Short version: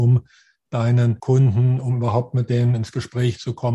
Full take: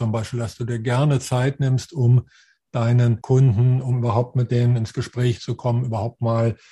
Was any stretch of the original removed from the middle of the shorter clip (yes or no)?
no